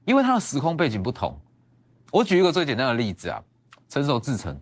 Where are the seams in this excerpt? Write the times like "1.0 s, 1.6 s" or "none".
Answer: 2.1 s

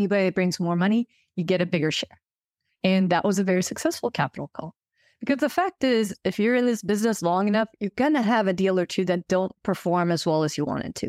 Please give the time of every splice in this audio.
2.7 s

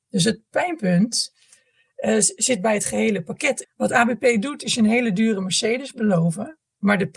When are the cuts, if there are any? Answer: 3.6 s

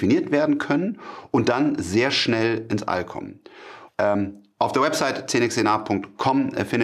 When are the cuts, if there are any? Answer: 3.9 s

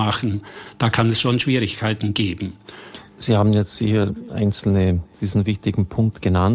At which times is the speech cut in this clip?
3.1 s, 5.1 s

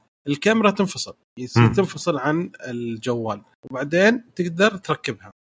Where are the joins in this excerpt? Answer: none

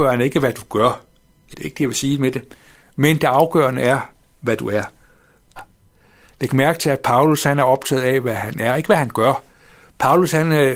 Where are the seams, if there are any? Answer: 1.5 s, 5.6 s

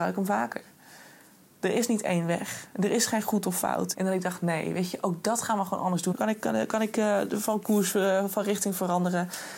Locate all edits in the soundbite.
3.9 s, 6.1 s

